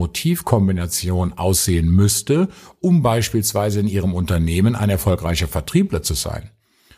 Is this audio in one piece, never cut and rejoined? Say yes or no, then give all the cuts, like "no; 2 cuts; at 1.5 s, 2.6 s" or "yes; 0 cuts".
yes; 0 cuts